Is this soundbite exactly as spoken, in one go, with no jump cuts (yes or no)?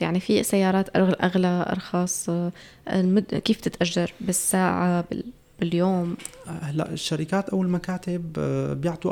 yes